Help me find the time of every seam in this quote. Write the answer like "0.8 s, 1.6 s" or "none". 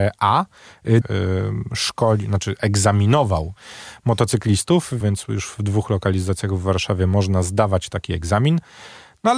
1.0 s, 5.0 s